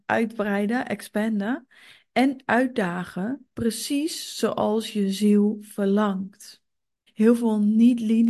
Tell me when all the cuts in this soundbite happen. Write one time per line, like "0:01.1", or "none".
0:07.1